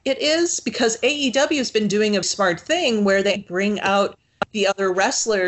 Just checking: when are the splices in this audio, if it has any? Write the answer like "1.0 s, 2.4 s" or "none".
2.2 s, 3.4 s